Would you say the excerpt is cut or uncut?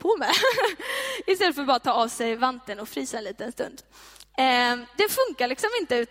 uncut